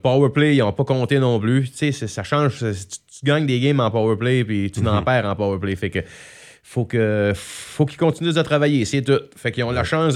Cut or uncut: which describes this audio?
uncut